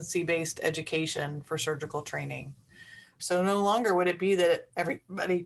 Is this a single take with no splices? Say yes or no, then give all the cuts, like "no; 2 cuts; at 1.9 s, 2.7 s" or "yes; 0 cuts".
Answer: no; 1 cut; at 3.2 s